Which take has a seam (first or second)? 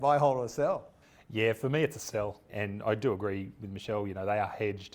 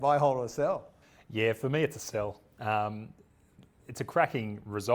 first